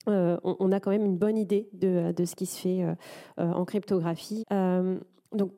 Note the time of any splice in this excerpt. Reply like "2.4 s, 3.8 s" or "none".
4.4 s